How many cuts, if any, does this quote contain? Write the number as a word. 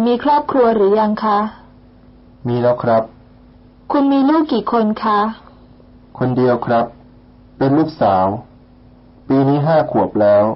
zero